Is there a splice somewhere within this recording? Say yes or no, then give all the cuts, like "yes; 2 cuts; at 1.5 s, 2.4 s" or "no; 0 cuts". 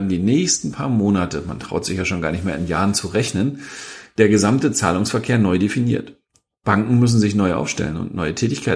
no; 0 cuts